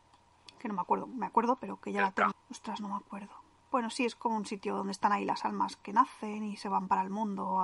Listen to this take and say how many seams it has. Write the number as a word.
one